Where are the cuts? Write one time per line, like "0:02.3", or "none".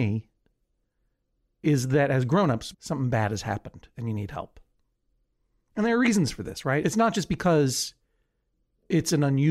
0:02.7